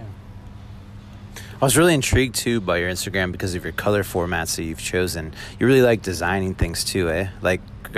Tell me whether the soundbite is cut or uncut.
uncut